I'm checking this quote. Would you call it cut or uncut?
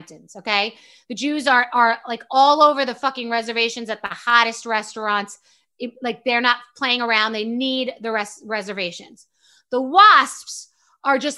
uncut